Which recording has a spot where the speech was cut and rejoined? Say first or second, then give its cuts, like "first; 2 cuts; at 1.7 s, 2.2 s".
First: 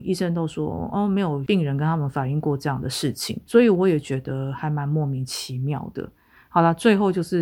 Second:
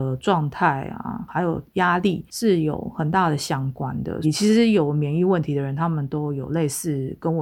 second; 1 cut; at 4.2 s